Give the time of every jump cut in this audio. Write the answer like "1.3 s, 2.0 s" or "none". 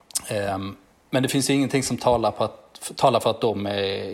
none

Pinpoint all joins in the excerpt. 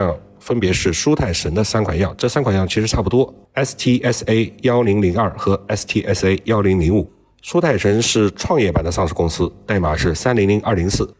3.4 s

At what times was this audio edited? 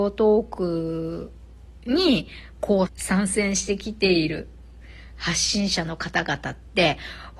2.9 s

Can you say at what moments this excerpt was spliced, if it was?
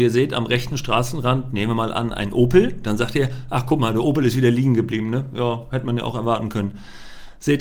none

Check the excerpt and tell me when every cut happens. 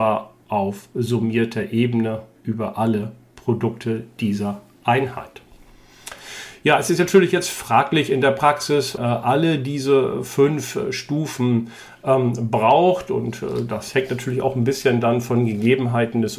9.0 s

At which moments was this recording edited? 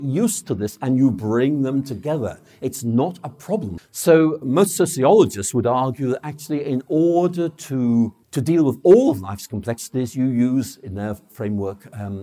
3.8 s, 8.2 s

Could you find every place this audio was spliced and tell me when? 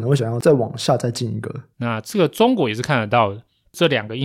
1.7 s

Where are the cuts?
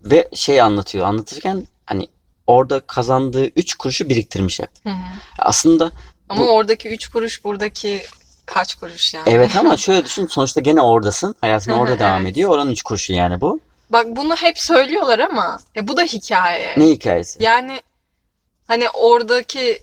4.8 s

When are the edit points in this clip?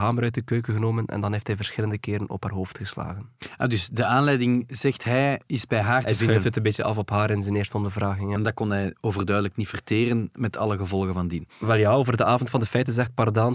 8.4 s

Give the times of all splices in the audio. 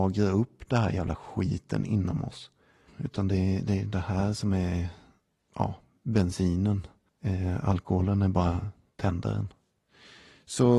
2.9 s

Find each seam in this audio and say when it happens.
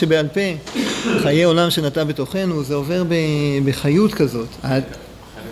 4.6 s

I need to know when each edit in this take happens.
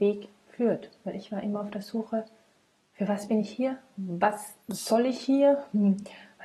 4.6 s

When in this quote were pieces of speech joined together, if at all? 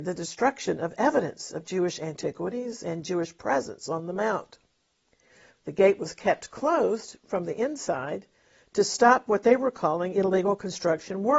5.5 s

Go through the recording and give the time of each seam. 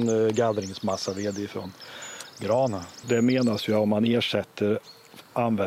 3.0 s

